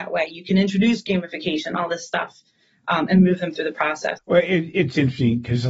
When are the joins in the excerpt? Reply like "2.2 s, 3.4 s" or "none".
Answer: 4.2 s